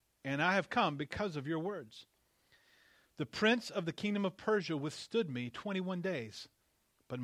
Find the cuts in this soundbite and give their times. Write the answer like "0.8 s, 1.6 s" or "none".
none